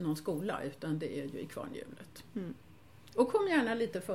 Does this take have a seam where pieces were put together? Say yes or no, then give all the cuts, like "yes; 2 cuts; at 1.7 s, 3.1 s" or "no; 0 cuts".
no; 0 cuts